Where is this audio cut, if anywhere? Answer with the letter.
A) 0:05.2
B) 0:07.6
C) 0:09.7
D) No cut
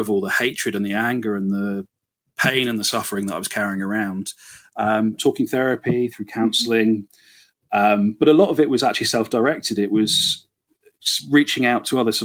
A